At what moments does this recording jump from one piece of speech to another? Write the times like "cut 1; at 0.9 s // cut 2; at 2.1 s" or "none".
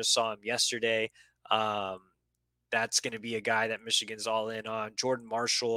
none

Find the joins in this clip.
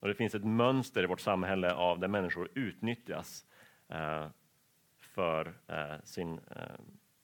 none

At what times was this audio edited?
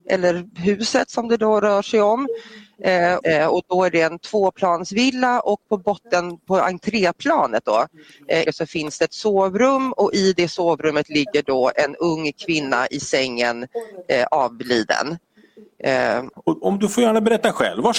cut 1; at 3.2 s // cut 2; at 8.5 s // cut 3; at 16.3 s

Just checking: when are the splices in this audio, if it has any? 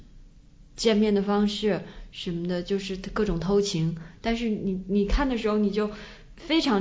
none

